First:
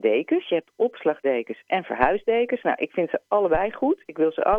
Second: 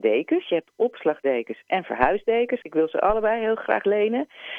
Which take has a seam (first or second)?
second